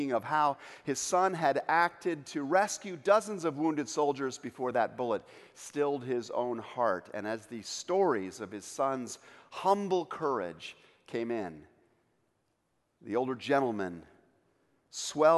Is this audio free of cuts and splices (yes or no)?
yes